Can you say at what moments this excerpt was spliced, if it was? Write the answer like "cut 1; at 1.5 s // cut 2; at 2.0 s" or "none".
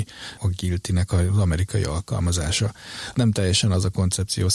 none